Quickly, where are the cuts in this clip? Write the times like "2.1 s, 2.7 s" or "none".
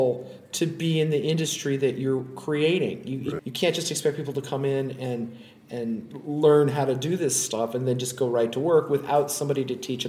3.4 s

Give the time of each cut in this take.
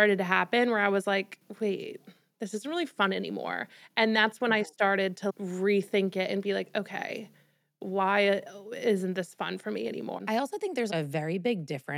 none

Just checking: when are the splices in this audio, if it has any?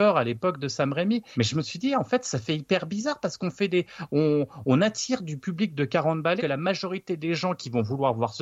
1.3 s, 6.4 s

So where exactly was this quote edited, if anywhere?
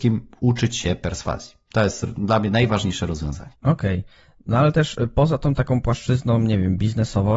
3.5 s

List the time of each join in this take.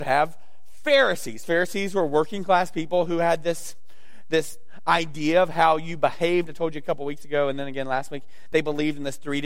none

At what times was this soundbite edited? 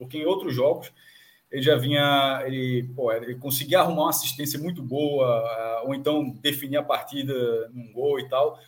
7.7 s

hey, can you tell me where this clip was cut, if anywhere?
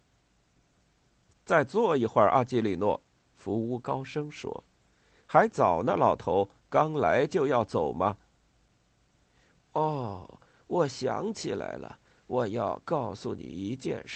none

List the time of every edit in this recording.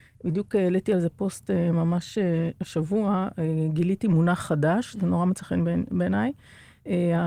4.9 s

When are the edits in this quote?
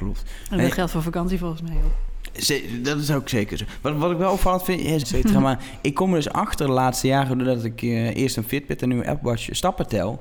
5.0 s

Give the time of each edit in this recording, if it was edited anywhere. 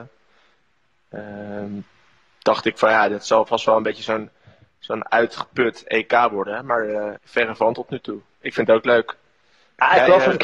7.2 s

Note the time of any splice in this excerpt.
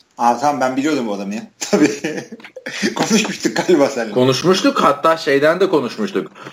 none

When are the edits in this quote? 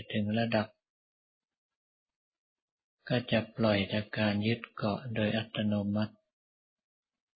none

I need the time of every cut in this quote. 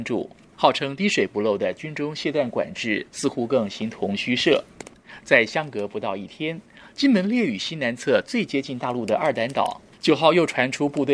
none

